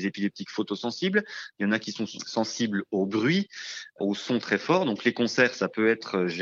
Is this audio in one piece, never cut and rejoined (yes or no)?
yes